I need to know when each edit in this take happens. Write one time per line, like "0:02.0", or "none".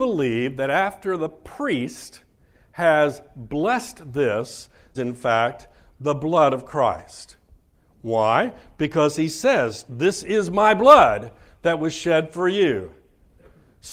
0:04.9
0:09.9